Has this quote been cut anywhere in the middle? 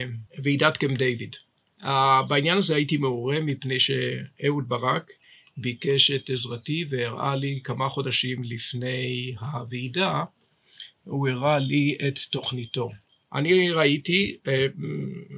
no; 0 cuts

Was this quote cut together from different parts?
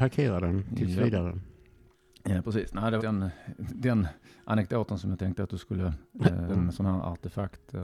yes; 2 cuts; at 3.0 s, 6.5 s

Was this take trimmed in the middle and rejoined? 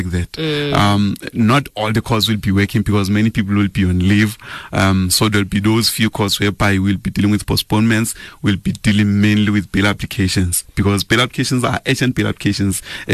no; 0 cuts

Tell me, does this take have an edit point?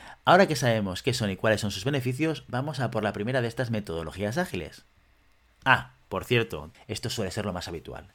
yes; 1 cut; at 6.7 s

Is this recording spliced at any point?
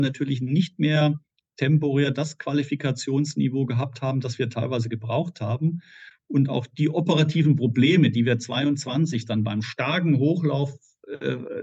no; 0 cuts

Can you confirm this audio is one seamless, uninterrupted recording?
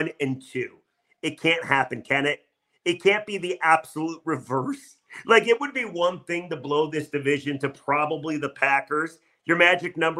yes; 0 cuts

